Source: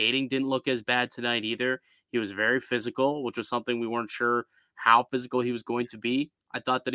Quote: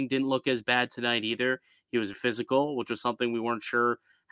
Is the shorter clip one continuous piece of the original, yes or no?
no